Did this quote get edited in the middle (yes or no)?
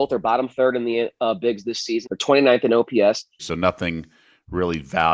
yes